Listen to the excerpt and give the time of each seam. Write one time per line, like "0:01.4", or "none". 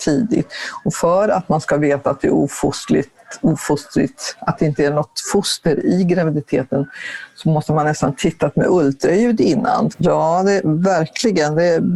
0:09.9